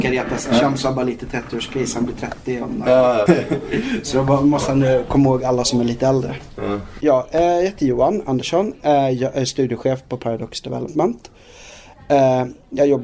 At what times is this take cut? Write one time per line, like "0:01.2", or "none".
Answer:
0:03.3